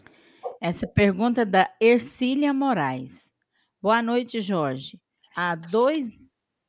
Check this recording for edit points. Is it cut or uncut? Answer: cut